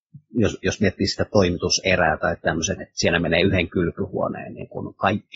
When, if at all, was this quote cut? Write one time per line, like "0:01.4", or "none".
0:02.8